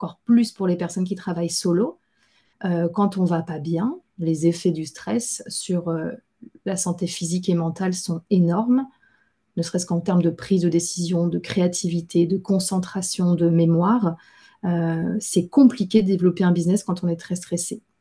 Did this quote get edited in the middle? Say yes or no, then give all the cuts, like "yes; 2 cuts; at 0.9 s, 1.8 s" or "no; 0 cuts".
no; 0 cuts